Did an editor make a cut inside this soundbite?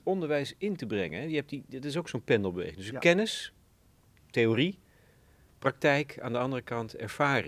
no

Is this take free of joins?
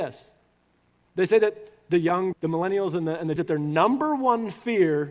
no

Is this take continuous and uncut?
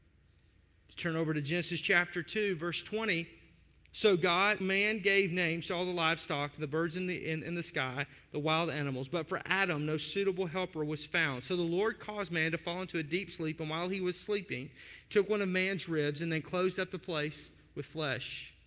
no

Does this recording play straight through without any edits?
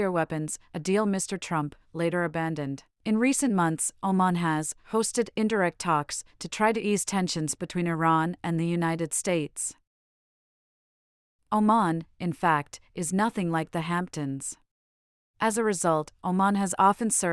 no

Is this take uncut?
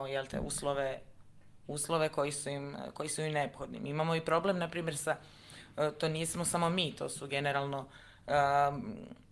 yes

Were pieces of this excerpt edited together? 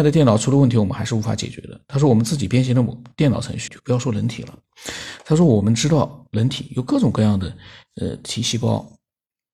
yes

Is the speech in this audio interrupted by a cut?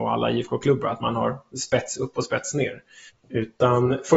yes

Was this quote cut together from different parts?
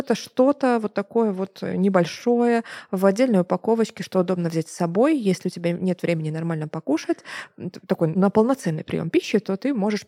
yes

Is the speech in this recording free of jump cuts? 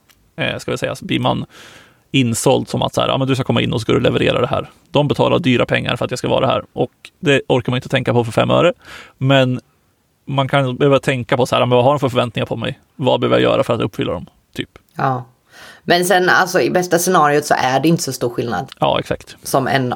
no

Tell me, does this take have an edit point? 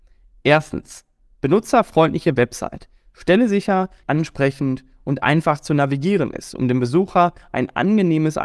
yes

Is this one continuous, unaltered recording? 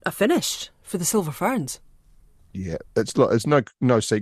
yes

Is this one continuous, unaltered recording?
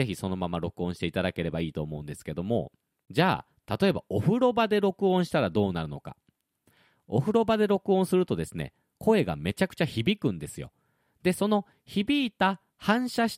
yes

